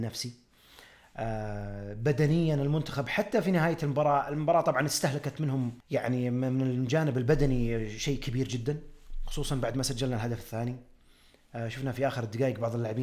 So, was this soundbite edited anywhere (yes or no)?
yes